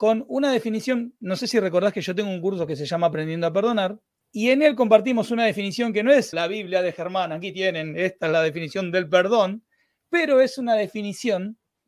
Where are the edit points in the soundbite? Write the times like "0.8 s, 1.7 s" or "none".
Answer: 4.2 s, 6.3 s